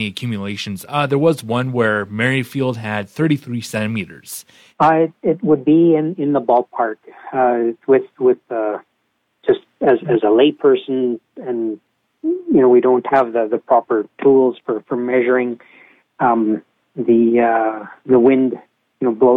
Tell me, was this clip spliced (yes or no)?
yes